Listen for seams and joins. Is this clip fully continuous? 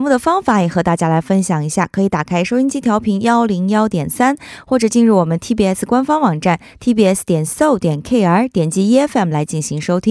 yes; 0 cuts

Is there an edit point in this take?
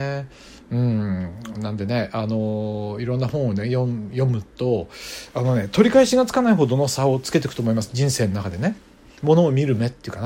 no; 0 cuts

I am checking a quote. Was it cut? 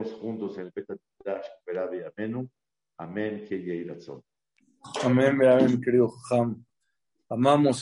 no; 0 cuts

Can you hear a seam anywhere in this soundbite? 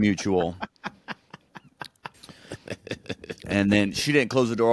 yes; 1 cut; at 2.1 s

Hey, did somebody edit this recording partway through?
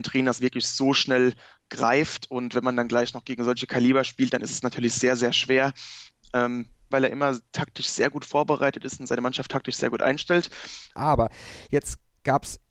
yes; 2 cuts; at 6.9 s, 10.9 s

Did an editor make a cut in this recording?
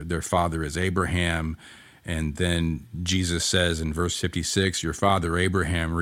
no; 0 cuts

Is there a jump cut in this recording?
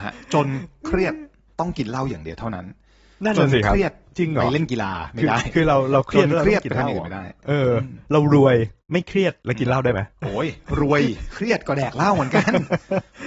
yes; 1 cut; at 10.1 s

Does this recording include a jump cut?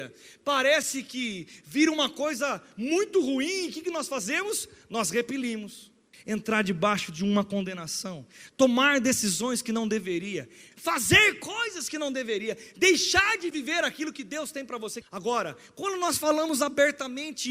yes; 3 cuts; at 6.1 s, 10.7 s, 15.0 s

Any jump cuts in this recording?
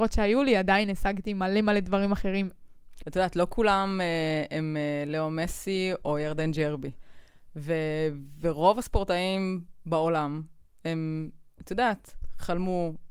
yes; 2 cuts; at 3.0 s, 6.0 s

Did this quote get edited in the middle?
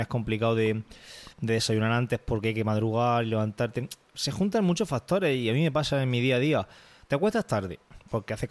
no; 0 cuts

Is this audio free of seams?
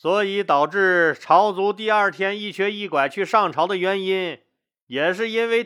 yes; 0 cuts

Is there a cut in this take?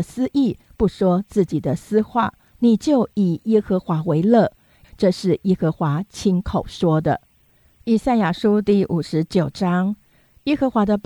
yes; 1 cut; at 4.8 s

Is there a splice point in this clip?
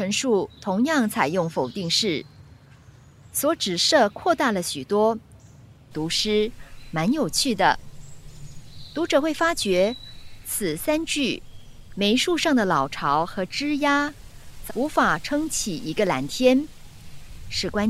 yes; 2 cuts; at 5.9 s, 14.7 s

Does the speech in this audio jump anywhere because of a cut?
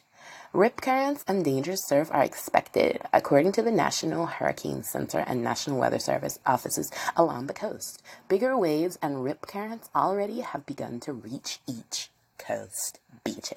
no; 0 cuts

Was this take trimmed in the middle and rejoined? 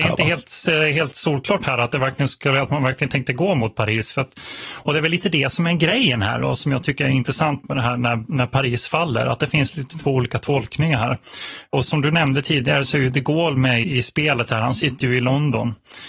yes; 1 cut; at 13.8 s

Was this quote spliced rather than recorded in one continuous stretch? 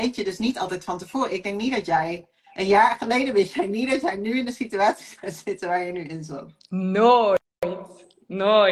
no; 0 cuts

